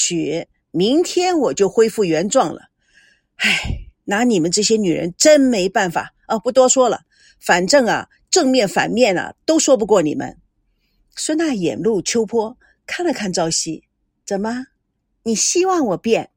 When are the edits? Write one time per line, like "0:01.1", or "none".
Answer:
none